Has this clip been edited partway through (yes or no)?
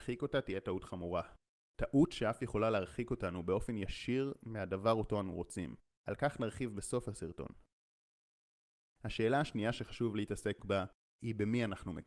no